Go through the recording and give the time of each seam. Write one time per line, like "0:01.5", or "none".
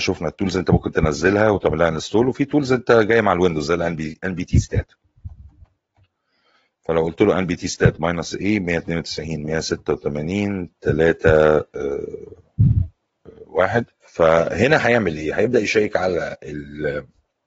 0:13.9